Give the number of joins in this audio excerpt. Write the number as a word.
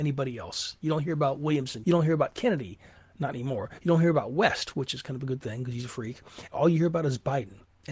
two